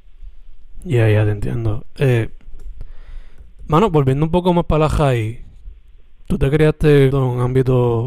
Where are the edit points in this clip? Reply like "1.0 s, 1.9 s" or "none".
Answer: 7.1 s